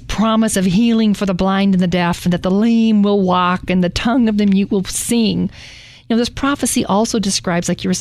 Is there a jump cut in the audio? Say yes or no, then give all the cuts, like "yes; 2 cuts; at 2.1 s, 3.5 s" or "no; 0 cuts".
no; 0 cuts